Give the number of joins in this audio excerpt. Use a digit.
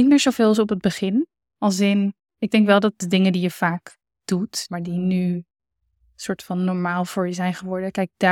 2